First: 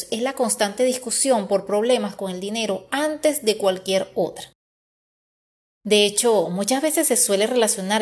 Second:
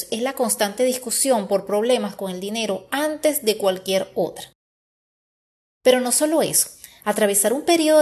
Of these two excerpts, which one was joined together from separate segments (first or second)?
first